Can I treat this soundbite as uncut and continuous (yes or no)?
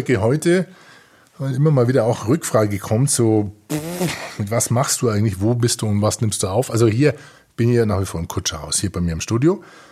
yes